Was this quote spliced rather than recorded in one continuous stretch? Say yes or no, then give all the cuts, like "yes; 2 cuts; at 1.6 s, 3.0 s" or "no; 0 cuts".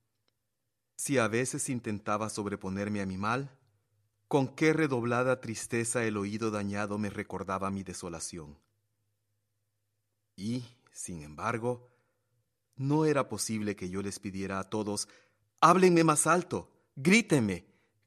no; 0 cuts